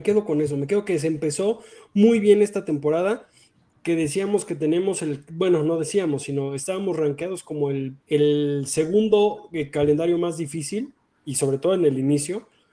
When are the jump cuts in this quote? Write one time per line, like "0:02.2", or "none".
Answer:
0:08.0